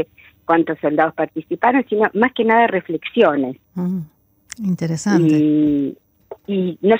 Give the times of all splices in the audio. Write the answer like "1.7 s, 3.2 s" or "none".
3.6 s